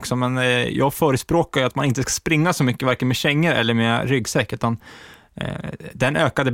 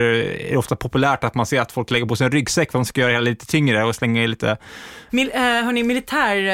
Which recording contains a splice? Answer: second; 1 cut; at 5.1 s

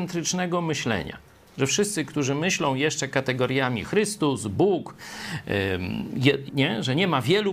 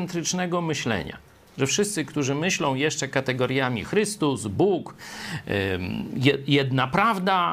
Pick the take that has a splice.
first; 1 cut; at 6.5 s

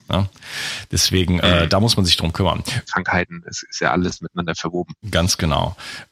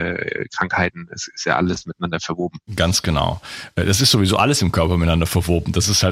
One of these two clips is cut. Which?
first; 1 cut; at 2.8 s

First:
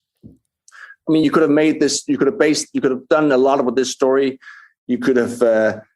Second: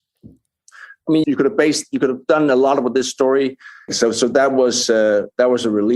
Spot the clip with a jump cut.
second; 2 cuts; at 1.2 s, 3.9 s

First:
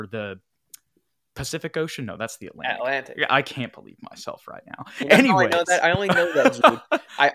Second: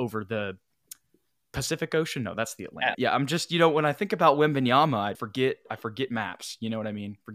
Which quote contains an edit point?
second; 2 cuts; at 2.9 s, 5.1 s

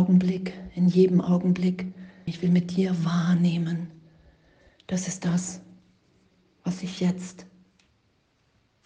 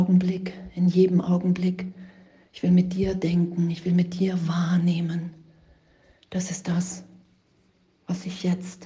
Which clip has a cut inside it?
first; 1 cut; at 2.3 s

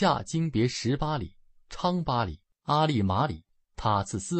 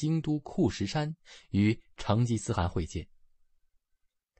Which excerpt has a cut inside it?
first; 1 cut; at 2.5 s

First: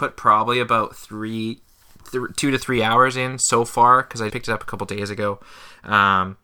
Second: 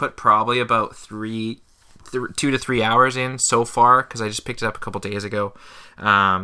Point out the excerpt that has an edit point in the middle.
first; 1 cut; at 4.3 s

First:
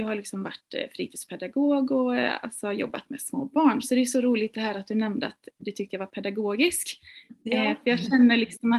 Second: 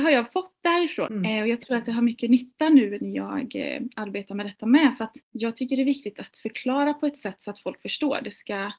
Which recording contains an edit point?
second; 2 cuts; at 1.1 s, 5.2 s

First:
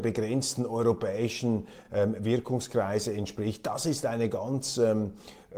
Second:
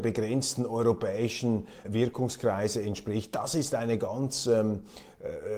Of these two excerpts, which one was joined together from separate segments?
second; 1 cut; at 1.8 s

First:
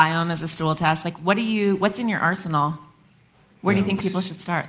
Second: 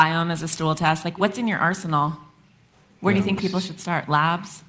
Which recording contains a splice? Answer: second; 1 cut; at 1.2 s

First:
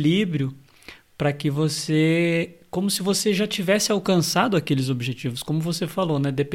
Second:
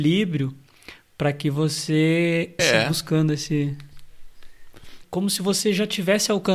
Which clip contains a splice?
second; 2 cuts; at 2.6 s, 5.0 s

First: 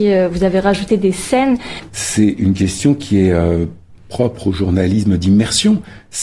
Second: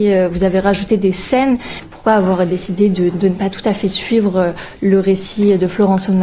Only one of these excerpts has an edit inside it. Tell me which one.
first; 1 cut; at 1.9 s

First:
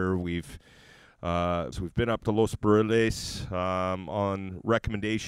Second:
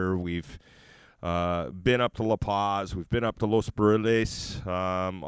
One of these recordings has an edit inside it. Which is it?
first; 1 cut; at 1.7 s

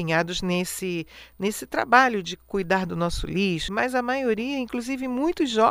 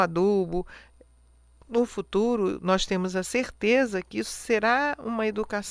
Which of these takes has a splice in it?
first; 1 cut; at 3.7 s

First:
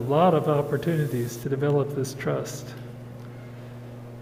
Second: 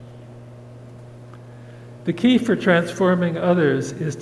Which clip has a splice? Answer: second; 1 cut; at 2.0 s

